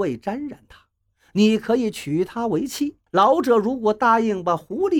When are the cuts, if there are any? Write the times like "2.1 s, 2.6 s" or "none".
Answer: 3.1 s